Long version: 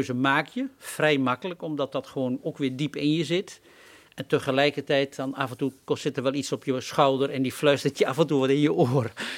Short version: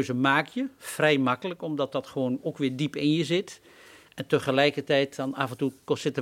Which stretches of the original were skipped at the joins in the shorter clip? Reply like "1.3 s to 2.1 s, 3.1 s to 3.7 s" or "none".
none